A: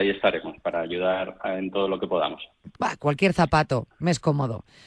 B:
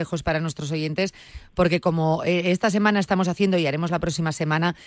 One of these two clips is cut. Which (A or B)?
A